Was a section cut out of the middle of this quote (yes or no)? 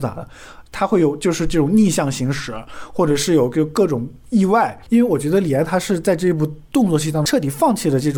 no